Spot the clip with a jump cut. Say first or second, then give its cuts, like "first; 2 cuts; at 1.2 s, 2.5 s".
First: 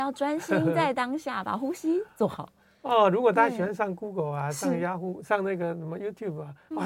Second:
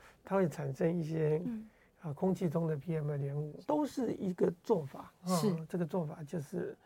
second; 1 cut; at 3.6 s